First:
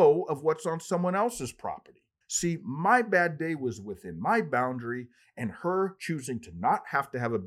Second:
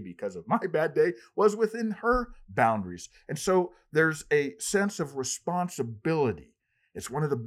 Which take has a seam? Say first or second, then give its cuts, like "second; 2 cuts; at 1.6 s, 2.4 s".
first; 1 cut; at 2.2 s